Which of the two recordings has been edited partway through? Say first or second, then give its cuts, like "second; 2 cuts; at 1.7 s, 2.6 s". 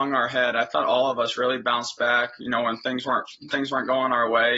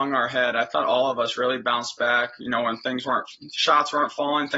first; 1 cut; at 3.5 s